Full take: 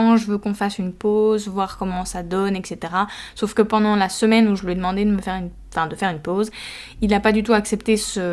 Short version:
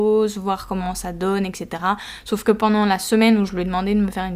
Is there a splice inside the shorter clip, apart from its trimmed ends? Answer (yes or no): no